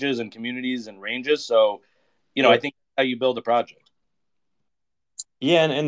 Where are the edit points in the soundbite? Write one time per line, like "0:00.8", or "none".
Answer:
none